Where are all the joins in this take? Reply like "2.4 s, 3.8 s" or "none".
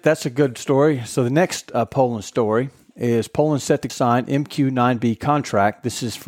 3.9 s